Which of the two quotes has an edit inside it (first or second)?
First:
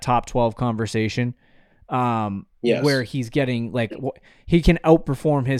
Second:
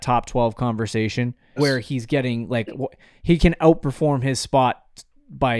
second